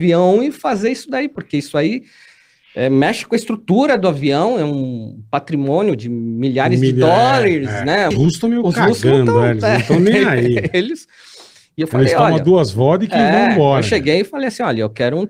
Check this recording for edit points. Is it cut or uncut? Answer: cut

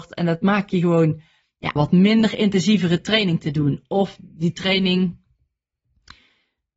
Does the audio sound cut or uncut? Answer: cut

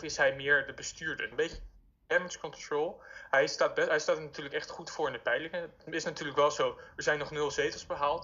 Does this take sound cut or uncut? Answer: cut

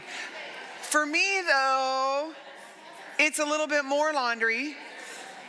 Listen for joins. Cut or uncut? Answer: uncut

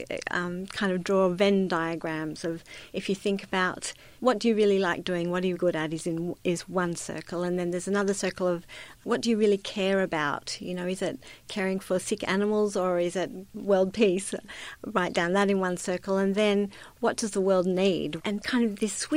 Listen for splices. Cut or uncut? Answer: cut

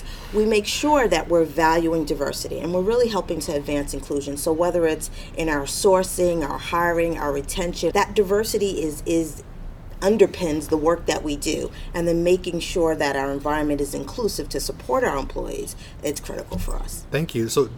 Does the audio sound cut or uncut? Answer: cut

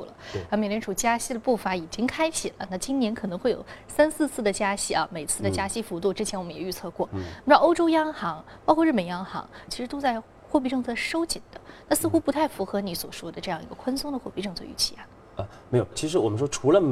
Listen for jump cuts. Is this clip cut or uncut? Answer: cut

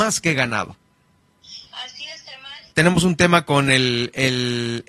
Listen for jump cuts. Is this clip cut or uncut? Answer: cut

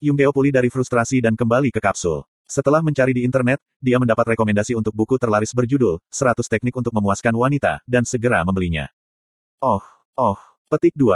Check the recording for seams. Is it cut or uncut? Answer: uncut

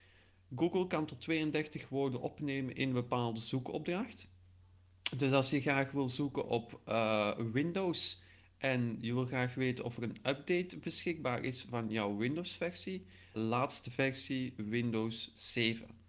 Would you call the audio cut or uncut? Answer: cut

